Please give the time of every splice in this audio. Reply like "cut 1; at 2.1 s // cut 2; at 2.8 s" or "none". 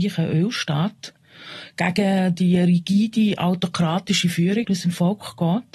cut 1; at 4.6 s